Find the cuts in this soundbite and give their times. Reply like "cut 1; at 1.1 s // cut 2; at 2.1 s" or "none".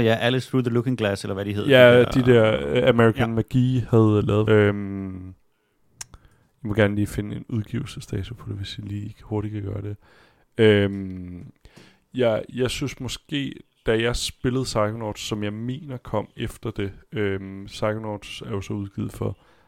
cut 1; at 4.5 s